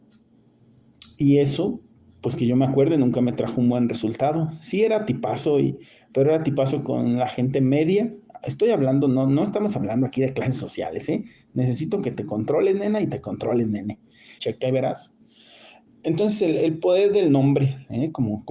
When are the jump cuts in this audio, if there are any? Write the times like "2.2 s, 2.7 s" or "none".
14.4 s